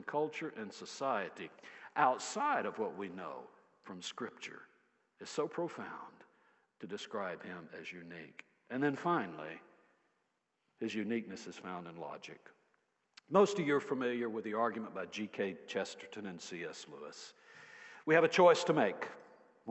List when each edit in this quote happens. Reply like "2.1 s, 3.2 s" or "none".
none

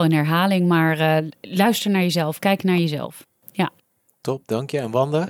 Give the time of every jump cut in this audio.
none

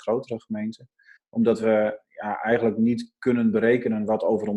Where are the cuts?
1.2 s

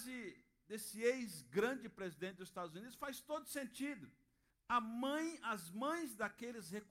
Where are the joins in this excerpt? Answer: 4.5 s

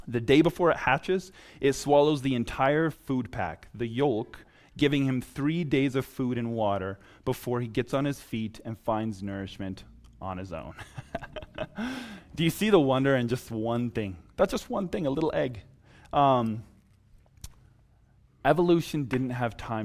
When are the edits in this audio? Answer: none

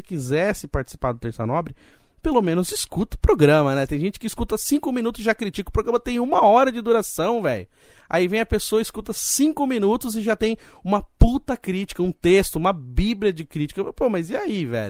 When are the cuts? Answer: none

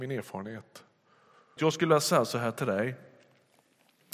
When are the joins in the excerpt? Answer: 1.6 s

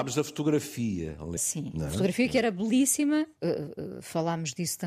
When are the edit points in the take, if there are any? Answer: 1.4 s, 3.4 s

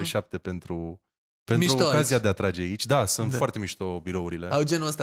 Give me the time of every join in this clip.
none

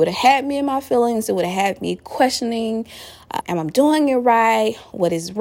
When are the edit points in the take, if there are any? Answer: 3.4 s

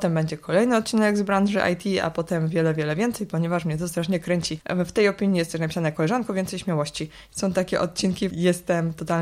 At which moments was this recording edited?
4.6 s, 7.3 s, 8.3 s

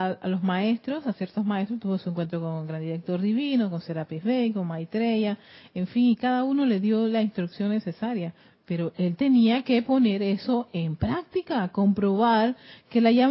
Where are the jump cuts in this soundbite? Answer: none

